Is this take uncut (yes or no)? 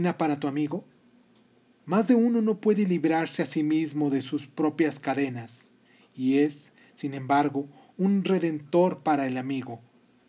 yes